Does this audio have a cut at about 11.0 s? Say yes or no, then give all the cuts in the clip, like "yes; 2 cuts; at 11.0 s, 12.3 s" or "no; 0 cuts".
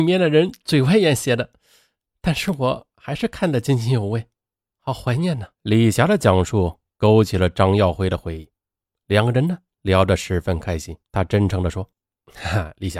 yes; 2 cuts; at 5.5 s, 11.0 s